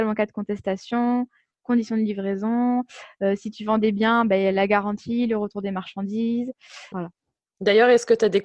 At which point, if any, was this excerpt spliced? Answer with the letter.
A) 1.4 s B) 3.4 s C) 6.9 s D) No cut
C